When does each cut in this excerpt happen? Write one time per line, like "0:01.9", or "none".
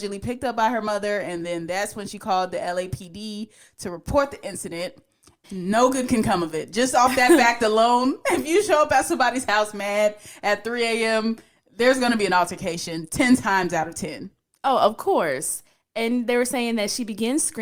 0:05.4